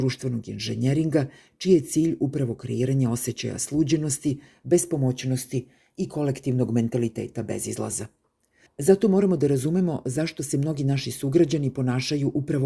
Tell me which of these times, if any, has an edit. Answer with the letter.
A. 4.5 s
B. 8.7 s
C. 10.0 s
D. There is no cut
B